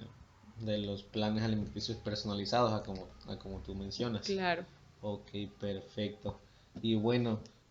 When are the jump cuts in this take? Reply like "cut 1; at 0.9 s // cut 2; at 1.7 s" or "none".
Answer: none